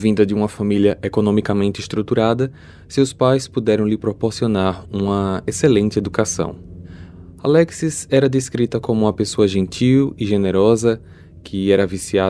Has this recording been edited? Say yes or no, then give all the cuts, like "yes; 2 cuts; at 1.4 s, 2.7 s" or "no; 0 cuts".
no; 0 cuts